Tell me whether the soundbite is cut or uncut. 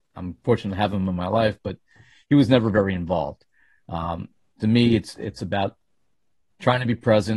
uncut